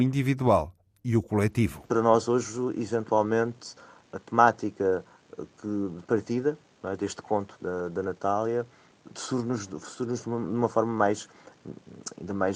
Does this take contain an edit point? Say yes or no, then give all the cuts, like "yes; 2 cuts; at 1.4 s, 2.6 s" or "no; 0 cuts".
no; 0 cuts